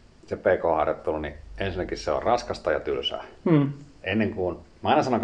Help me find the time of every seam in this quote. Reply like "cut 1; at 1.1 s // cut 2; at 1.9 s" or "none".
none

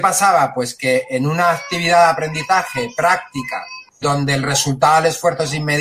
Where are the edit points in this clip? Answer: cut 1; at 4.0 s

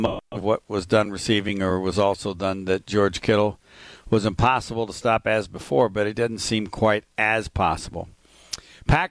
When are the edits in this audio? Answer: none

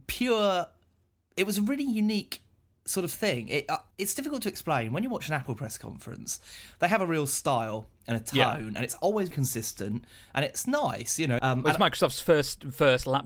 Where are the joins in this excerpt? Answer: cut 1; at 3.9 s // cut 2; at 9.3 s // cut 3; at 11.4 s

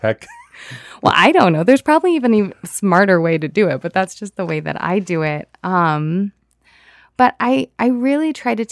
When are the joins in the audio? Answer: none

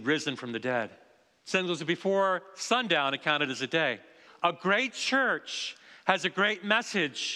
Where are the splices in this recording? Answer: cut 1; at 1.4 s // cut 2; at 4.3 s

